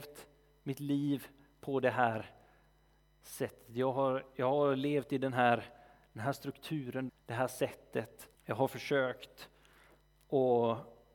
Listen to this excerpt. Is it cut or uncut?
cut